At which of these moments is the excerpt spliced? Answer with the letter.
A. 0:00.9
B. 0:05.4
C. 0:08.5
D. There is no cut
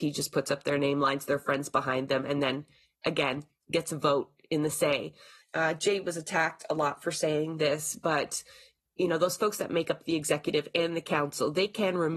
B